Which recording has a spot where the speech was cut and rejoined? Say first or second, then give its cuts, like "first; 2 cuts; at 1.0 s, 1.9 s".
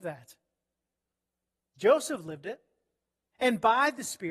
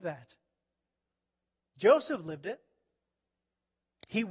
first; 1 cut; at 3.3 s